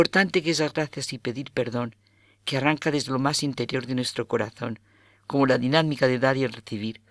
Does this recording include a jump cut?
no; 0 cuts

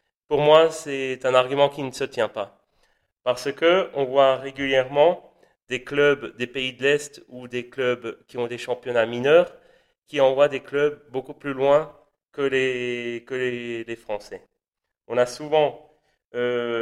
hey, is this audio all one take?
yes; 0 cuts

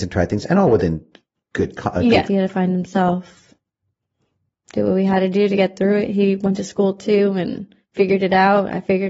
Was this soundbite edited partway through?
yes; 1 cut; at 2.3 s

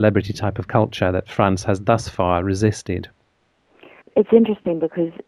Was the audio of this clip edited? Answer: yes; 1 cut; at 4.0 s

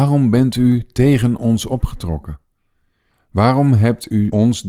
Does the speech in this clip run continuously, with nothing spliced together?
no; 1 cut; at 3.1 s

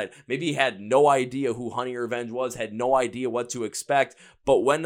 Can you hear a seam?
no; 0 cuts

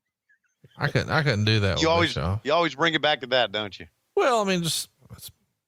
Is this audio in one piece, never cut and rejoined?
yes; 0 cuts

